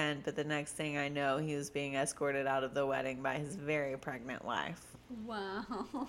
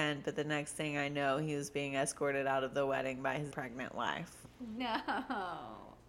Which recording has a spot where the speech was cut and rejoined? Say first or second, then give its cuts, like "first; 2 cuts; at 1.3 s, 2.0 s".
second; 2 cuts; at 3.5 s, 4.8 s